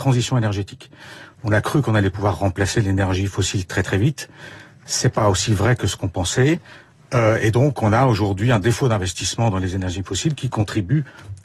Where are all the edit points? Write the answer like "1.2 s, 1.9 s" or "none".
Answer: none